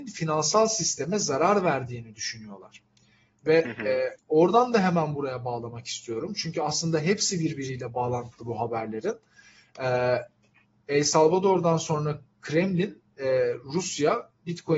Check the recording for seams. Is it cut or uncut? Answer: cut